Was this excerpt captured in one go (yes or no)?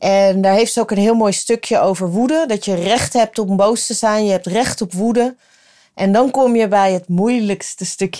yes